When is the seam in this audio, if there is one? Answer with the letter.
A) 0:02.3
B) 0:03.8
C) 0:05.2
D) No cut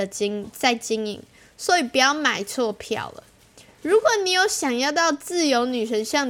D